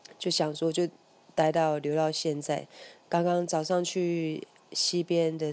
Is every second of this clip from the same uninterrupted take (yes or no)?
yes